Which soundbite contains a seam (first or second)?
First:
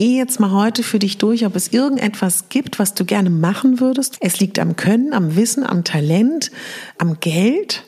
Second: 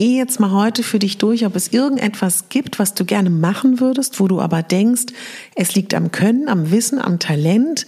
first